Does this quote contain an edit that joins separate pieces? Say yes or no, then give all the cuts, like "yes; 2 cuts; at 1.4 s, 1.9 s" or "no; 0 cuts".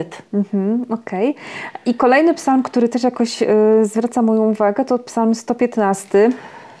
no; 0 cuts